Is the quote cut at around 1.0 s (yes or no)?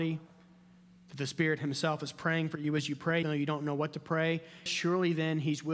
no